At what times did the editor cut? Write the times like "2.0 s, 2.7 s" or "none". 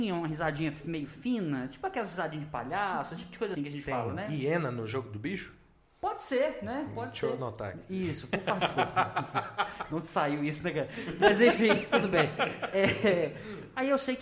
3.5 s